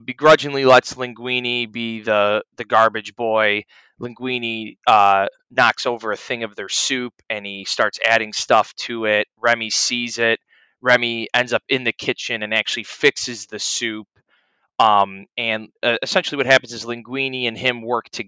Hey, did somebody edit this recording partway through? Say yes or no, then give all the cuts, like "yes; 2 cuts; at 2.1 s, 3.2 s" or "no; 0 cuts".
no; 0 cuts